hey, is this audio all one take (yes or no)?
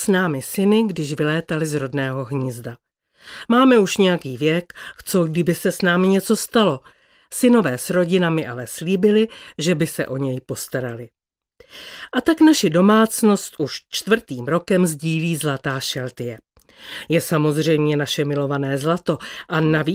no